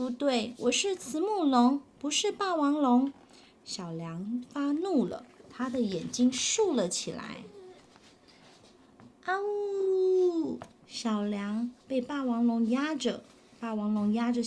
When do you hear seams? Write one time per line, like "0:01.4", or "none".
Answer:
0:11.8